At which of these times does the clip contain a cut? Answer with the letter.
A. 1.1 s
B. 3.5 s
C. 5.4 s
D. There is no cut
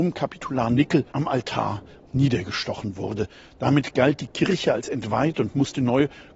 A